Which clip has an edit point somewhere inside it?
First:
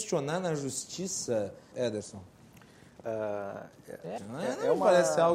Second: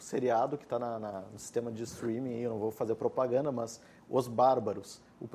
first; 2 cuts; at 1.7 s, 4.2 s

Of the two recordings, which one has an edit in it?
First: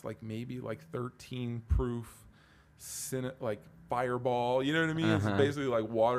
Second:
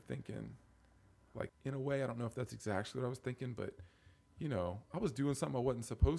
second; 1 cut; at 1.5 s

